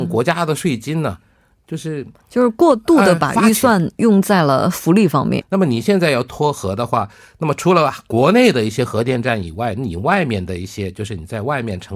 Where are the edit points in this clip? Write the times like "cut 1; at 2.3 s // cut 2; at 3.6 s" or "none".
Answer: cut 1; at 5.4 s